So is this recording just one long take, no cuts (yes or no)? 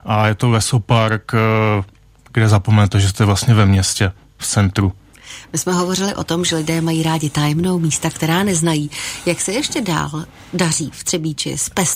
yes